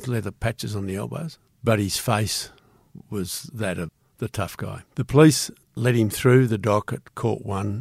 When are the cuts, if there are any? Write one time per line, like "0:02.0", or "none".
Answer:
0:01.5
0:04.9